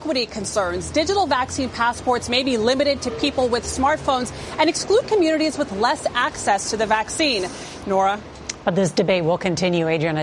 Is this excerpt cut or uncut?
cut